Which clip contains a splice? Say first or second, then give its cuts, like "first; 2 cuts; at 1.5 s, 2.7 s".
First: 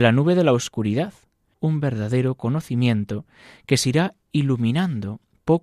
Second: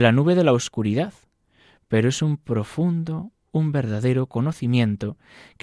first; 1 cut; at 1.5 s